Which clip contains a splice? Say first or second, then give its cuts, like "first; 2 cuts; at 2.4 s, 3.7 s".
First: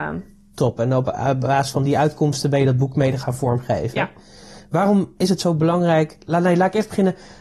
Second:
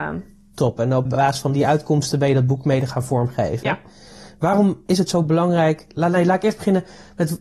second; 1 cut; at 1.1 s